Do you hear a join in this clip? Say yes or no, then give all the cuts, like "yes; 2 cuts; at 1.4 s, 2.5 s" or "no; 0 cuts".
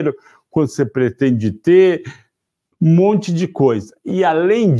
yes; 1 cut; at 2.7 s